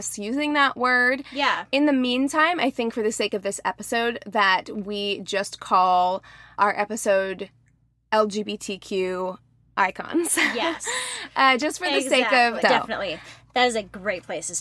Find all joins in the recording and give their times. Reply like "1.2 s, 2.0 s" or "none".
6.6 s, 12.6 s